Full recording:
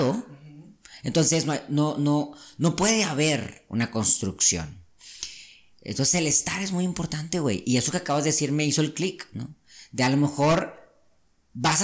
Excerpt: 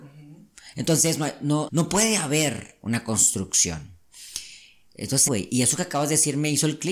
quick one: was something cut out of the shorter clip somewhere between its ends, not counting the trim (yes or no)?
yes